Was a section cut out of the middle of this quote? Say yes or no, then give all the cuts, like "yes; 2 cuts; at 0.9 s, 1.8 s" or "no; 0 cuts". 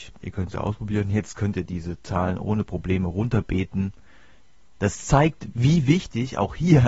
yes; 1 cut; at 4.8 s